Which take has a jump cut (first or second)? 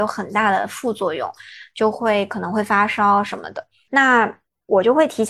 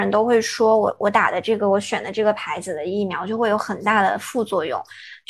first